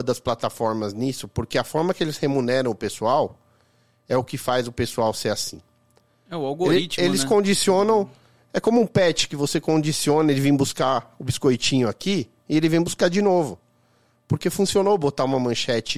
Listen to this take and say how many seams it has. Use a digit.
0